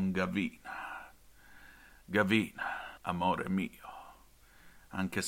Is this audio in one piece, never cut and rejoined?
no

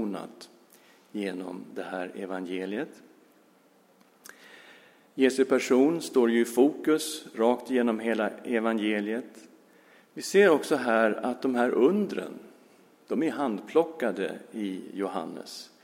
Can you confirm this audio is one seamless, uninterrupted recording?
yes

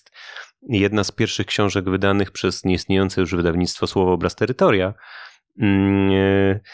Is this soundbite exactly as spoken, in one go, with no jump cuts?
yes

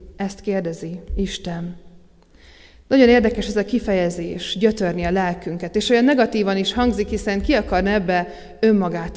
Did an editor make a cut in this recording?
no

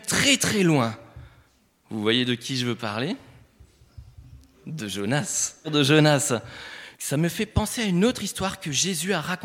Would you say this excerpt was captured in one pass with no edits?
no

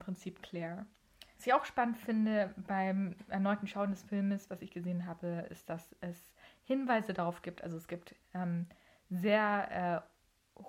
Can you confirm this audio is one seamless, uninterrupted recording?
no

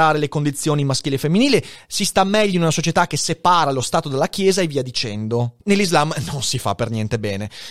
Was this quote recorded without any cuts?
no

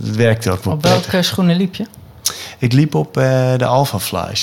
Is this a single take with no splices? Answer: yes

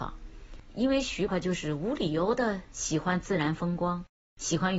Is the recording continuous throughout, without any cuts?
no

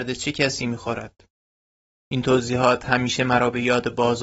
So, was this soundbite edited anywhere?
yes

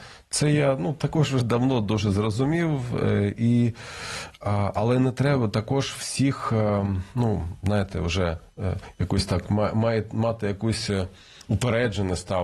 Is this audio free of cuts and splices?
yes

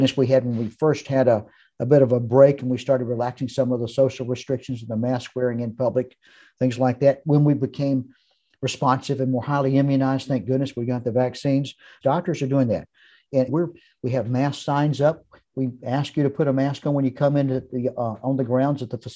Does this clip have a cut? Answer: yes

